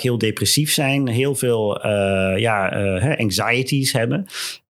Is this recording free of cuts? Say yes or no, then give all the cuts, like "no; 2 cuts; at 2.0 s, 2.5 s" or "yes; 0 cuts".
yes; 0 cuts